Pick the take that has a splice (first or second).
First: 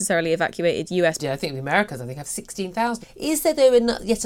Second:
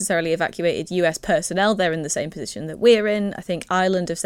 first